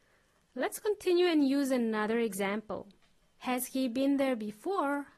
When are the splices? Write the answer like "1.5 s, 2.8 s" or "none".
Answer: 3.2 s

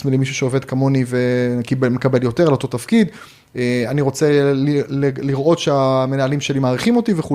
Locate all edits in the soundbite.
none

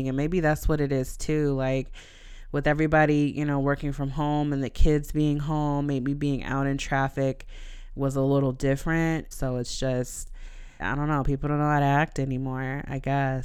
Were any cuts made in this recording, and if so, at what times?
9.3 s, 10.8 s

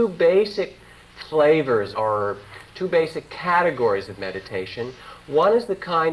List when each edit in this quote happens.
1.9 s

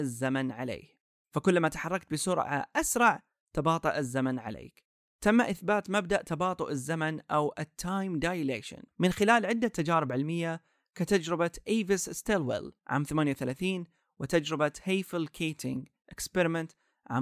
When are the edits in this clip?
8.9 s, 12.8 s

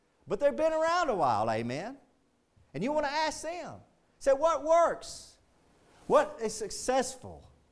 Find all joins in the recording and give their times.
none

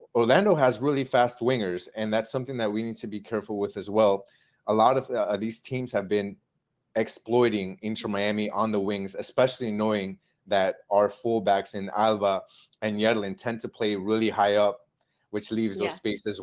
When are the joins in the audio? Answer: none

